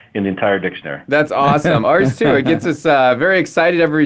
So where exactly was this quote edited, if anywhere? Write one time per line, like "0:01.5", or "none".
0:01.8